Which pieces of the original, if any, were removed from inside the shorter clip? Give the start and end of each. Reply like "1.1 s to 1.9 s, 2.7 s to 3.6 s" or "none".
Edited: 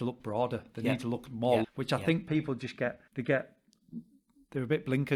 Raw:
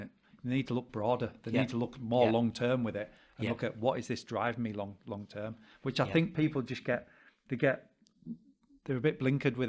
2.3 s to 5.7 s, 7.1 s to 7.4 s